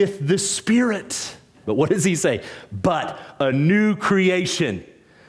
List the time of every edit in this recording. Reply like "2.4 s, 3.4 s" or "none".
1.6 s